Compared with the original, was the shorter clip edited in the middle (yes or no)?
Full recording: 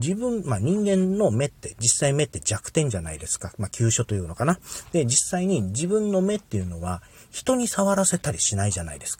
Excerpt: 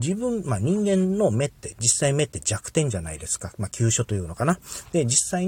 no